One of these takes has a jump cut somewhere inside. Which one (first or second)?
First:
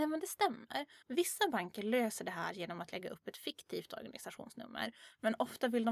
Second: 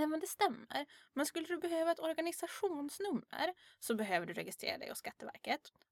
first